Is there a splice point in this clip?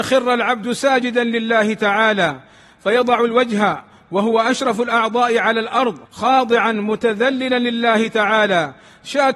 yes; 1 cut; at 6.1 s

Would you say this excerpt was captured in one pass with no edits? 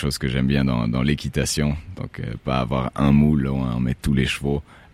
yes; 0 cuts

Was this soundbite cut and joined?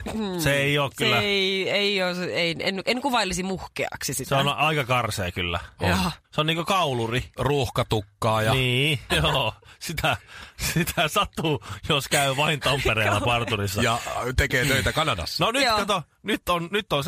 yes; 3 cuts; at 6.2 s, 7.4 s, 9.1 s

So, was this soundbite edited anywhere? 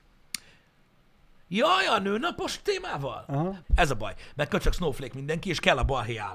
yes; 1 cut; at 3.6 s

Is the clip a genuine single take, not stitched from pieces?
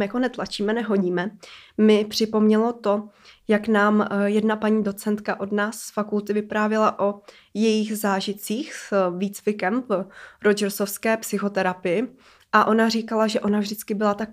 yes; 0 cuts

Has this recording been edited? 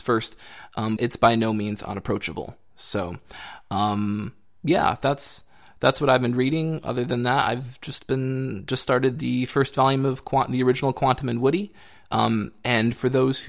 yes; 2 cuts; at 1.0 s, 12.1 s

